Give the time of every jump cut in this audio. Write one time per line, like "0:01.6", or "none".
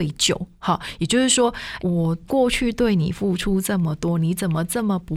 0:01.8